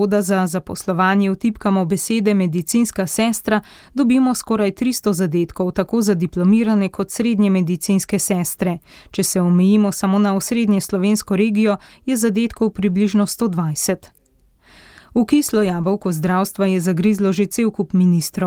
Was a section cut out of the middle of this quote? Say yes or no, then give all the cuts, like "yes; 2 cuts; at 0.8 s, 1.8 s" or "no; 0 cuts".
no; 0 cuts